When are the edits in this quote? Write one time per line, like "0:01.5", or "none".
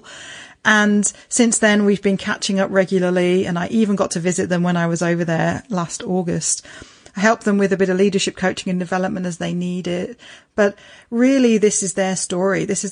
none